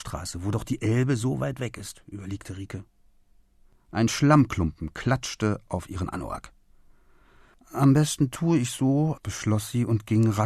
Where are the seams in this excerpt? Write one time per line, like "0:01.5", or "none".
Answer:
0:03.7
0:09.2